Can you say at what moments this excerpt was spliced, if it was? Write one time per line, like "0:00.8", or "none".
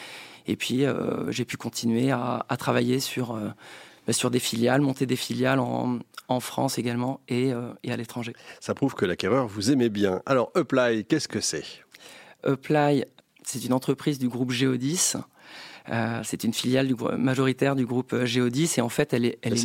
none